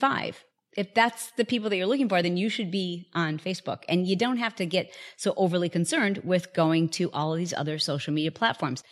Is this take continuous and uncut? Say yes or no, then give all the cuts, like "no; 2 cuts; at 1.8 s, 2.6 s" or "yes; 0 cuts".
yes; 0 cuts